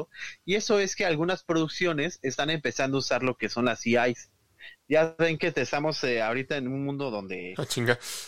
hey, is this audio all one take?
yes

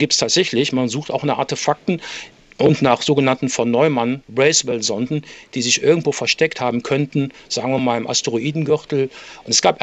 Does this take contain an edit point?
no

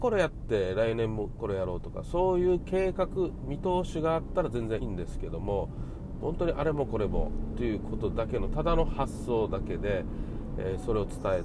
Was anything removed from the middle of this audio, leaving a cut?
yes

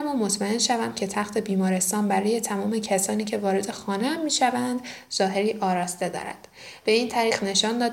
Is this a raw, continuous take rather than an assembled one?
yes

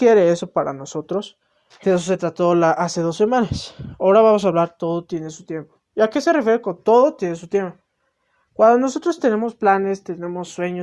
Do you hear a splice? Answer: yes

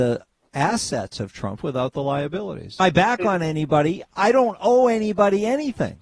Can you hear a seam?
yes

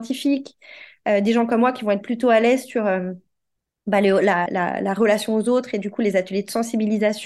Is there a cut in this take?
yes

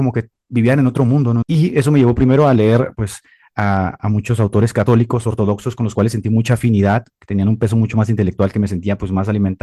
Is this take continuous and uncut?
no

